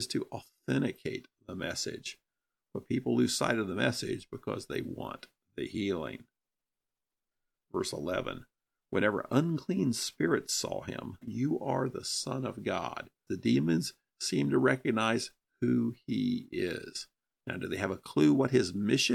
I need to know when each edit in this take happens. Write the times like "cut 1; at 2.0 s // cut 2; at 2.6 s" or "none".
cut 1; at 11.2 s // cut 2; at 13.3 s